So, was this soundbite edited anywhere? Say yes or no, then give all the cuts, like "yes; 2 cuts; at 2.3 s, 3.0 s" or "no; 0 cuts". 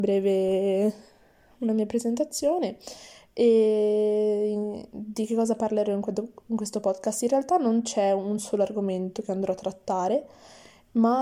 no; 0 cuts